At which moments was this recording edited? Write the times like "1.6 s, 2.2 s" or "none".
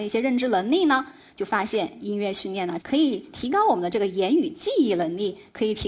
2.8 s